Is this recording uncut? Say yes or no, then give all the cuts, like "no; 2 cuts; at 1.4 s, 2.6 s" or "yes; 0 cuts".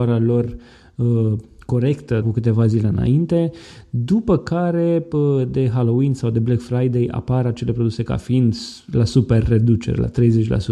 no; 1 cut; at 2.2 s